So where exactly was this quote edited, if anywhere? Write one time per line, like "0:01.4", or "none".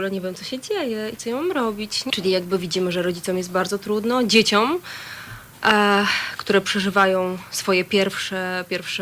0:02.1